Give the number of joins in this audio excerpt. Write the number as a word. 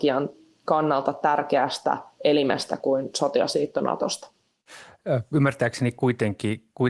zero